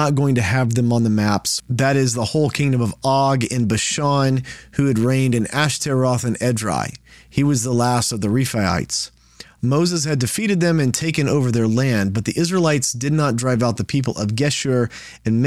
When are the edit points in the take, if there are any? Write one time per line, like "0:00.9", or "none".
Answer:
0:01.6